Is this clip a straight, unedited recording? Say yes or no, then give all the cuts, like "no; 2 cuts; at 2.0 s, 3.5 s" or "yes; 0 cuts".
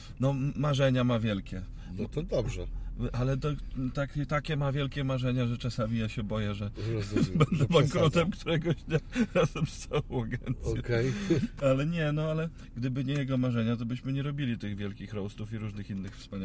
yes; 0 cuts